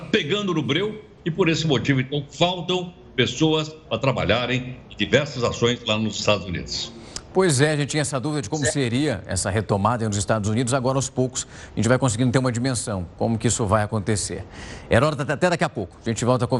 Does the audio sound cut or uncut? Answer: uncut